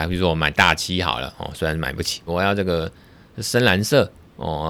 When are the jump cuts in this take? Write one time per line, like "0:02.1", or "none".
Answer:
0:02.3